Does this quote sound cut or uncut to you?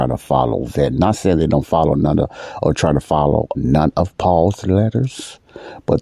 cut